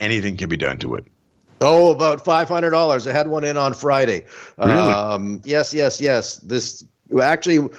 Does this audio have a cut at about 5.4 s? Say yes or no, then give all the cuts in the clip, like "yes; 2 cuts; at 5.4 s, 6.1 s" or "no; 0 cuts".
yes; 1 cut; at 5.4 s